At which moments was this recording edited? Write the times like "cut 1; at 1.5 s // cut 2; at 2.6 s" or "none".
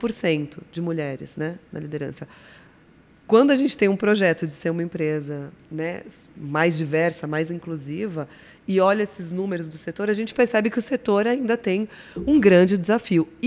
none